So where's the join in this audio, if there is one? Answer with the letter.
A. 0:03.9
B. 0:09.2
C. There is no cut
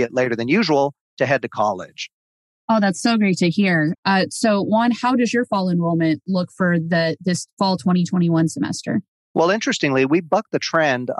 A